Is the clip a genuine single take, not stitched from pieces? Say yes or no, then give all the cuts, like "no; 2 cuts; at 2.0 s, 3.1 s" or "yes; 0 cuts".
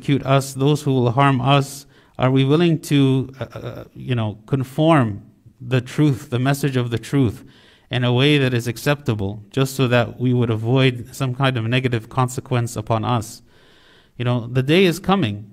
yes; 0 cuts